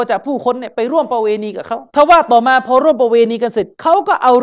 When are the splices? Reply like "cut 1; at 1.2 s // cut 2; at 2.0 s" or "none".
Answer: cut 1; at 1.9 s